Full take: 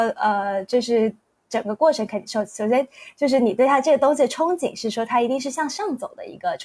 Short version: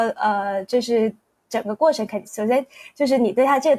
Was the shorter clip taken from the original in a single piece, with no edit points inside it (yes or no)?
no